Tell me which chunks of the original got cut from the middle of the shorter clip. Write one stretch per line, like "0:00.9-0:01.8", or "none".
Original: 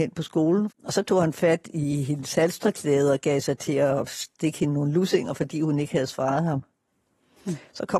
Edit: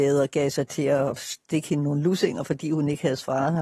none

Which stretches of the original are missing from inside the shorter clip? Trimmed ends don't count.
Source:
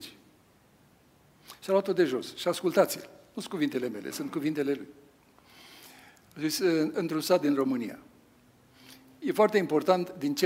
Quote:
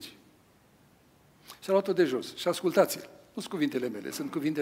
none

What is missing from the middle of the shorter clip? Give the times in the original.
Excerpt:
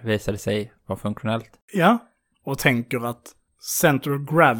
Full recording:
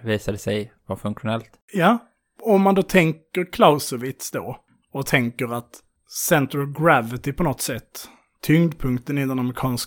0:02.3-0:04.8

